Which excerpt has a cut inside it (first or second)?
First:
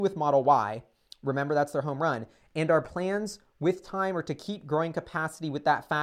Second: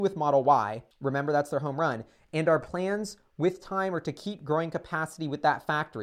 second